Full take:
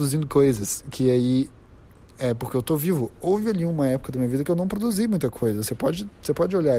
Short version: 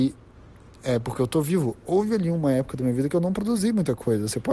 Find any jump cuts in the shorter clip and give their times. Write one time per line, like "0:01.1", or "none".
none